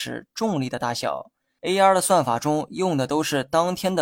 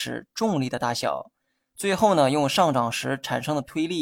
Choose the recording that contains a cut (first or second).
first